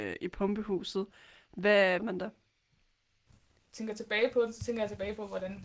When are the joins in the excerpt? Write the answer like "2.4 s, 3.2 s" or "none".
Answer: 2.0 s